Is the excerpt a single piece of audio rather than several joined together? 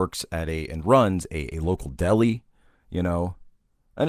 yes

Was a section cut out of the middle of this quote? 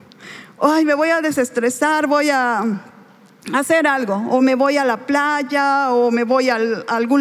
no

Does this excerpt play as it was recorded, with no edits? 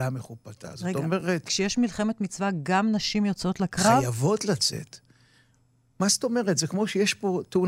yes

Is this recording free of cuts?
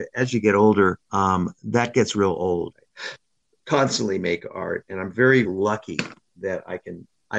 no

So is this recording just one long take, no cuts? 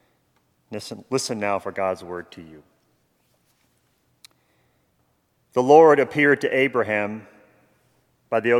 yes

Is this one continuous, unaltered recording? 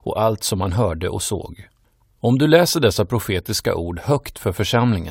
yes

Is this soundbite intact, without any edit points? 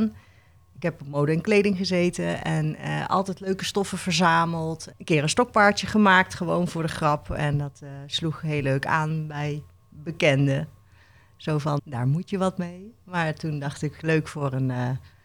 no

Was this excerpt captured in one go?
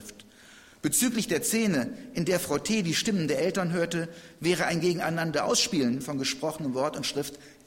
no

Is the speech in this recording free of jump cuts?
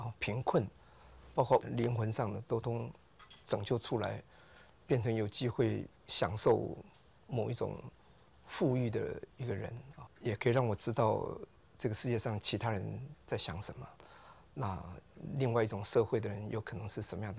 no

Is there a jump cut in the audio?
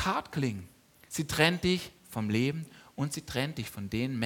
yes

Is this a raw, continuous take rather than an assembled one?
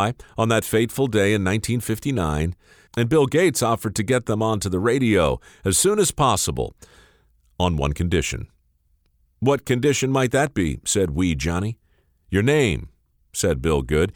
no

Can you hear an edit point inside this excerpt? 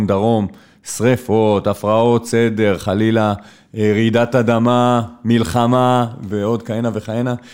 no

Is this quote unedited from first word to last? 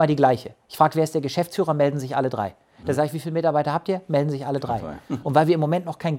no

